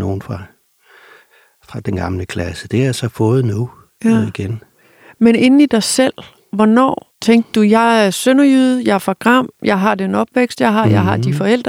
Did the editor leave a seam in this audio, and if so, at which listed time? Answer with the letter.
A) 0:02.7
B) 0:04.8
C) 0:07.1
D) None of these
C